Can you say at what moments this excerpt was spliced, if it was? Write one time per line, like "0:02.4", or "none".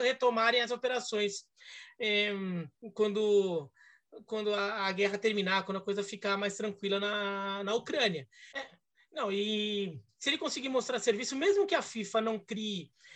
0:08.5